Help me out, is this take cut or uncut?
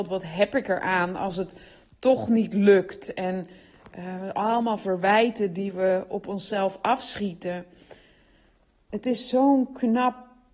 cut